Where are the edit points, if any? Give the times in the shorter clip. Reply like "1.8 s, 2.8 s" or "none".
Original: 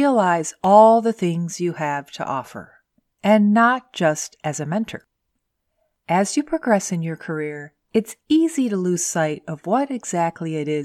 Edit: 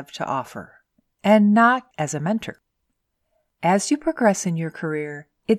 1.9 s

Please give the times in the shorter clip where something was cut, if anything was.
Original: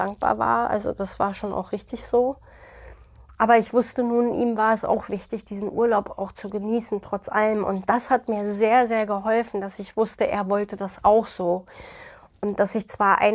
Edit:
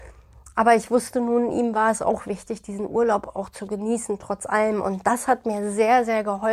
none

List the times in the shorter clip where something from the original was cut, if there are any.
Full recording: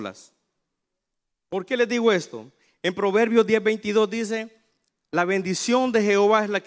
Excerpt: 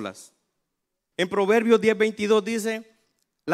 1.1 s

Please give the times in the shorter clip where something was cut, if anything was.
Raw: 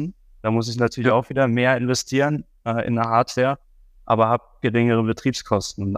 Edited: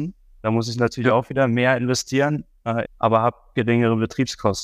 2.8 s

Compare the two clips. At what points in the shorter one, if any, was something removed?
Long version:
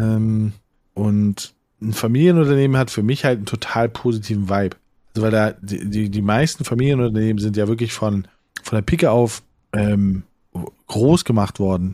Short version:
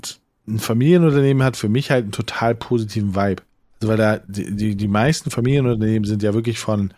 none

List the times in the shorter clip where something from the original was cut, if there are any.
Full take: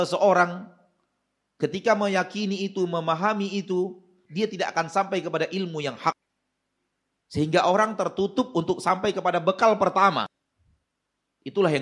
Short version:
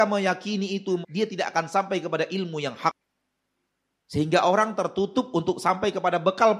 1.0 s

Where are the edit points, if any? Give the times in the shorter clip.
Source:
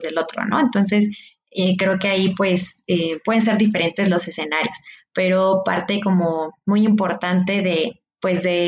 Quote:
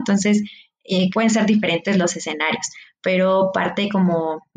1.1 s

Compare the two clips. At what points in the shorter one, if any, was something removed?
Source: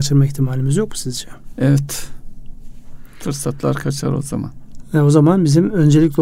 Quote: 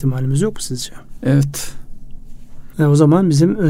2.7 s

